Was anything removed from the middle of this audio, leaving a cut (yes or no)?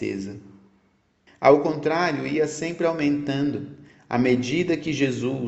yes